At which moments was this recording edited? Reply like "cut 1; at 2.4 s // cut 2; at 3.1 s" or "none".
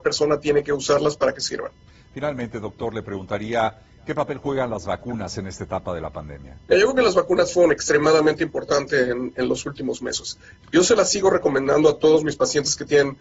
cut 1; at 6.7 s // cut 2; at 10.6 s